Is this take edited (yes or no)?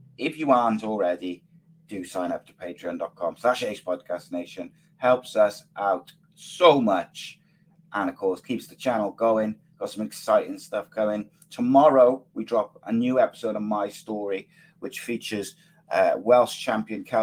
no